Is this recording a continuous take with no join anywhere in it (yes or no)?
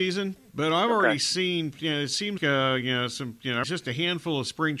no